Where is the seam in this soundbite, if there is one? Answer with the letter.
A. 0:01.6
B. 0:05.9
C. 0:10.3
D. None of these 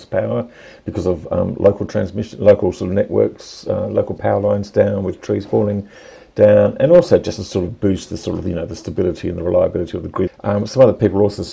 C